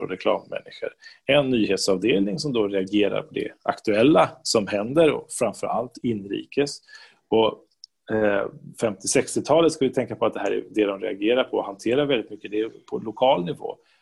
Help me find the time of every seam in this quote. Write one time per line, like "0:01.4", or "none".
none